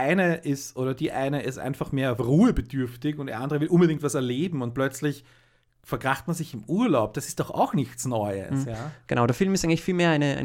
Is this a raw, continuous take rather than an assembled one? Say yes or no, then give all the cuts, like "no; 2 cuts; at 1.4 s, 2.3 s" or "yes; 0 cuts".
yes; 0 cuts